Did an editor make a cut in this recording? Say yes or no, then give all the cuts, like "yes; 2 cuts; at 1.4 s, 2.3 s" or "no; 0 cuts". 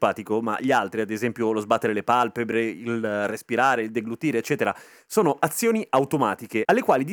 no; 0 cuts